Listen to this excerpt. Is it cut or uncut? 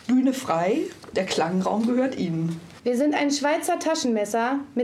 cut